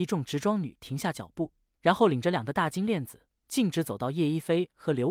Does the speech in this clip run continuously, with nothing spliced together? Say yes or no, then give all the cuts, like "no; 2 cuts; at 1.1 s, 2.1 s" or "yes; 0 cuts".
yes; 0 cuts